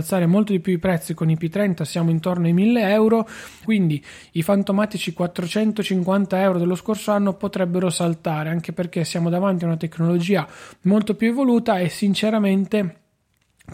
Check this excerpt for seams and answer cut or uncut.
cut